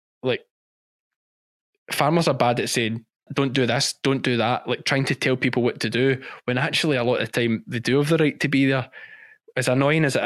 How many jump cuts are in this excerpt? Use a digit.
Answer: 1